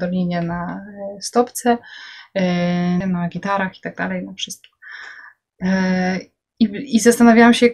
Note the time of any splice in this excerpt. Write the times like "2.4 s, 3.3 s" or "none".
3.0 s